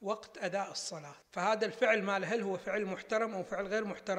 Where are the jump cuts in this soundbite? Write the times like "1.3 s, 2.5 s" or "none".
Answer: 1.2 s